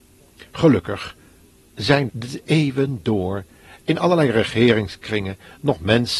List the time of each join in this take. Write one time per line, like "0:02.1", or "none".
0:02.1